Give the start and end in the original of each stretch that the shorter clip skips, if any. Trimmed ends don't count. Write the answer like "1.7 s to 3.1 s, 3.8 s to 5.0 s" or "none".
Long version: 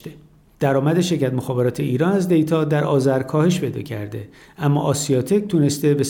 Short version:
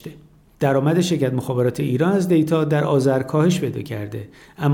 none